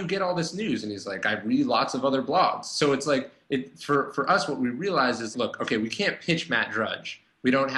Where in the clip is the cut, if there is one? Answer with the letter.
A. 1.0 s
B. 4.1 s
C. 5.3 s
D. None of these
C